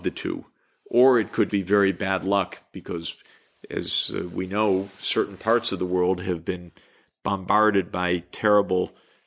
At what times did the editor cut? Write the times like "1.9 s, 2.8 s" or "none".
1.5 s